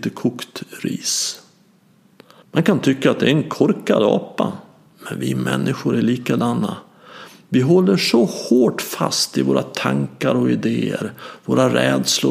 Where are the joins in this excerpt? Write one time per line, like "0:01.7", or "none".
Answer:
0:02.4